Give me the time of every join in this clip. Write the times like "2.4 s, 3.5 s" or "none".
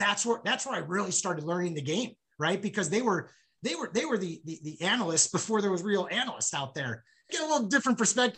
7.3 s